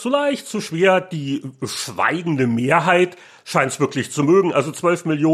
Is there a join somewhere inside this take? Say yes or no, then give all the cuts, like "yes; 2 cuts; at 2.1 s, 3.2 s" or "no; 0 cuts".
no; 0 cuts